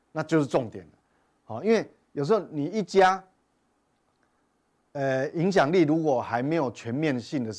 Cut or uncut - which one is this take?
uncut